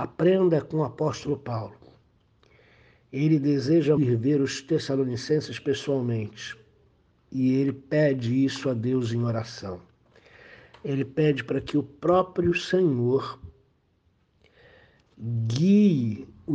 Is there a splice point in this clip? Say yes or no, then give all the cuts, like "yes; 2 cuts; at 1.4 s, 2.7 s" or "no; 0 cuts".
yes; 1 cut; at 4.0 s